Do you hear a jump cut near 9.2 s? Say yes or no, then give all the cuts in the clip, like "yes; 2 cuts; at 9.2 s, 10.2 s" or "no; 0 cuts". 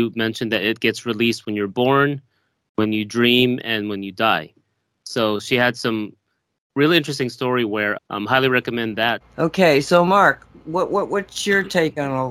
yes; 2 cuts; at 8.0 s, 9.2 s